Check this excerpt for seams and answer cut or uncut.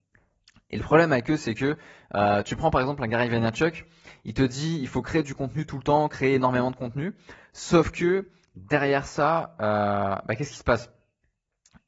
uncut